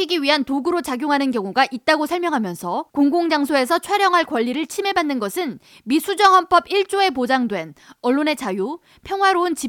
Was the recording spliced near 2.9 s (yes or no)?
yes